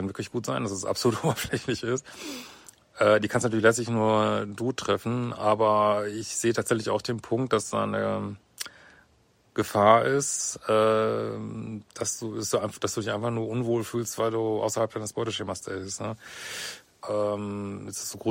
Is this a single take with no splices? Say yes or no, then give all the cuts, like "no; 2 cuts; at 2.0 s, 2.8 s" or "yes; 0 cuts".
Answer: no; 1 cut; at 17.0 s